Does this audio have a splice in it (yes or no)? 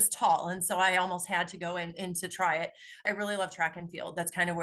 yes